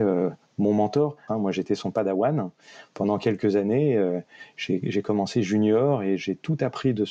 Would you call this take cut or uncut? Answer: cut